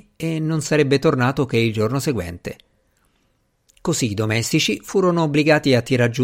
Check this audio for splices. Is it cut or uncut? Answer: uncut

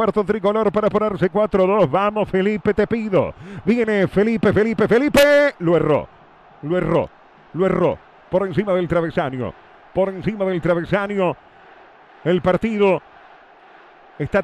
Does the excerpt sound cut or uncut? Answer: uncut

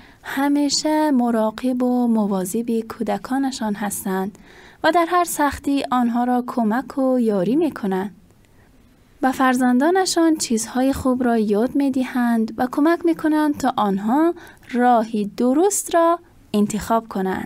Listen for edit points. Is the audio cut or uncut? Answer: uncut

